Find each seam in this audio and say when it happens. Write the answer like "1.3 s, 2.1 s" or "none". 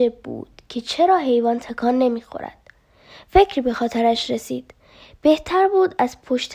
none